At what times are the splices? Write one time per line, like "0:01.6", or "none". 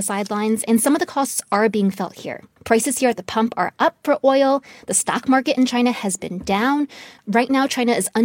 0:02.6
0:07.2